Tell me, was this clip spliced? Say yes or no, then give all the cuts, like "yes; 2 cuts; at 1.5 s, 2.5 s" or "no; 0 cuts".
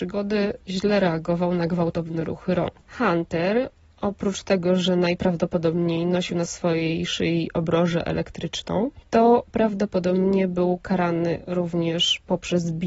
yes; 2 cuts; at 2.9 s, 9.0 s